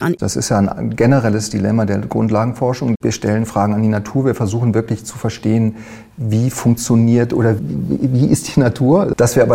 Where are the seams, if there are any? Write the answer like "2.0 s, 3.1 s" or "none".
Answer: 7.6 s